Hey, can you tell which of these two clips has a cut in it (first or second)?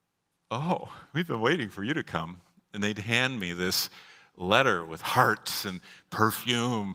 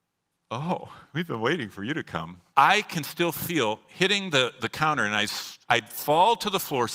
second